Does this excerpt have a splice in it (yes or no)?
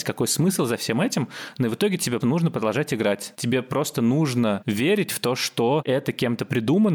yes